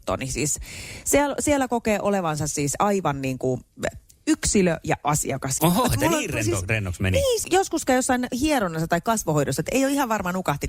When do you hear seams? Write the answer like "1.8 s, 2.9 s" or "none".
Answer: 5.6 s, 7.4 s